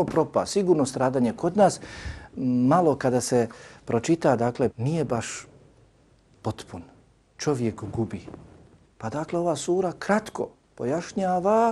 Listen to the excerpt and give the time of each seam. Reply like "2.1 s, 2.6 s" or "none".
4.7 s, 8.8 s